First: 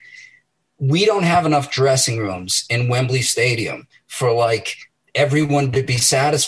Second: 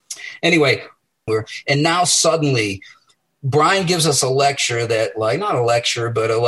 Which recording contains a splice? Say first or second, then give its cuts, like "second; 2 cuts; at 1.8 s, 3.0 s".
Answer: second; 1 cut; at 1.3 s